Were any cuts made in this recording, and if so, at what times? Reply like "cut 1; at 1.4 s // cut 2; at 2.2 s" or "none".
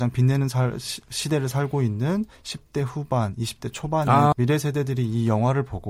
cut 1; at 4.3 s